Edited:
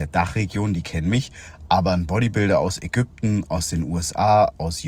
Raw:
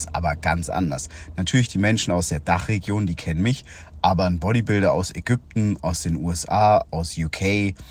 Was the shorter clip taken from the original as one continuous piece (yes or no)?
yes